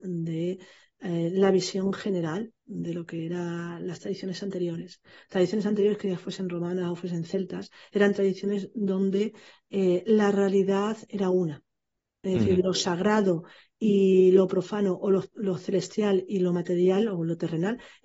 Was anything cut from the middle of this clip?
no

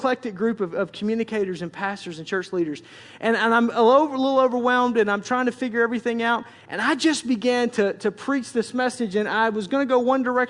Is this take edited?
no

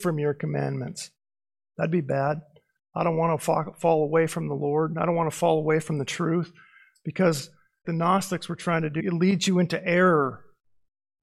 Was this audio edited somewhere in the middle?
yes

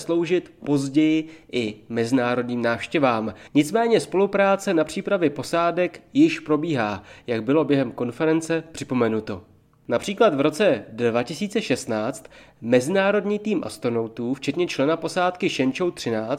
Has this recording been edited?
yes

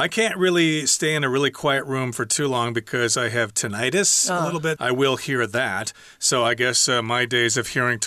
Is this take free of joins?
no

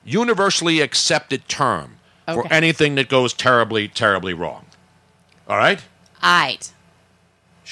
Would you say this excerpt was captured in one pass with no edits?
yes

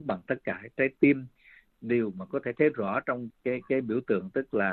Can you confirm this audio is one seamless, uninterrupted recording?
no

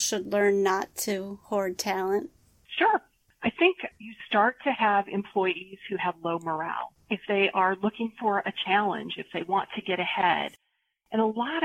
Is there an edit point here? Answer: no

